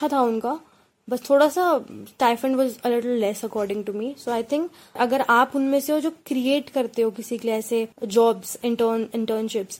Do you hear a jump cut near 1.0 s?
no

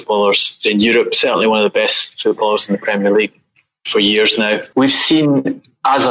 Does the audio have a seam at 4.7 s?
yes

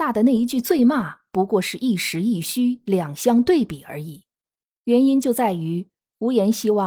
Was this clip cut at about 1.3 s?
no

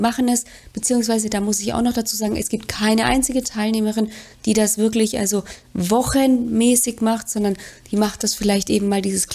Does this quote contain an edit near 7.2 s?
no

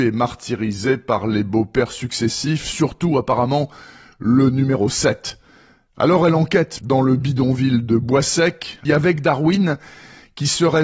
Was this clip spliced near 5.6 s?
no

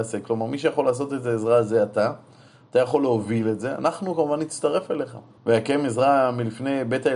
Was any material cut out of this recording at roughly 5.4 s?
yes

